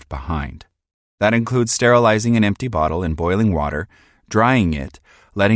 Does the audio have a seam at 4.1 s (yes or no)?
no